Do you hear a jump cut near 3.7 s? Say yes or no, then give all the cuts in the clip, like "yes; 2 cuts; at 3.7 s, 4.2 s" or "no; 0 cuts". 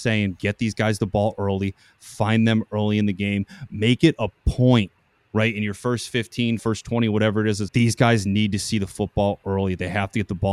no; 2 cuts; at 6.6 s, 7.7 s